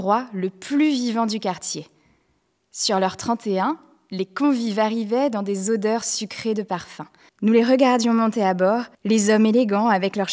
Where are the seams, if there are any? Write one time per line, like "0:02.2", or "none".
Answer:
0:07.3
0:08.9